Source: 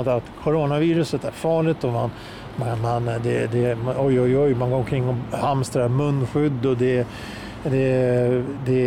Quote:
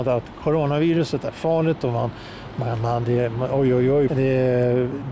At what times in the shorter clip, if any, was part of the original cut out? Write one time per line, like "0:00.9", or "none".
0:03.0
0:04.1